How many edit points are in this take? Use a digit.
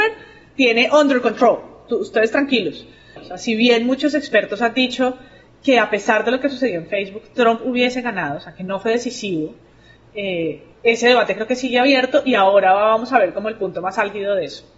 1